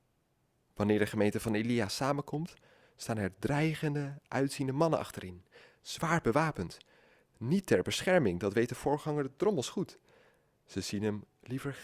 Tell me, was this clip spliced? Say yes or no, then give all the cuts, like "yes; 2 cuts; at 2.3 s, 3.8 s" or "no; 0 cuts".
no; 0 cuts